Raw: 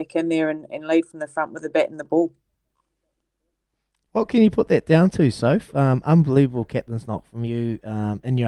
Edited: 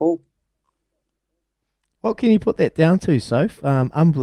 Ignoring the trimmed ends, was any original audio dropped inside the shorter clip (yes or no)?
no